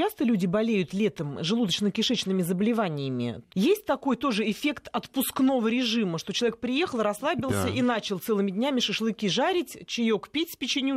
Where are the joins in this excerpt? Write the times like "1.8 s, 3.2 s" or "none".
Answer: 3.5 s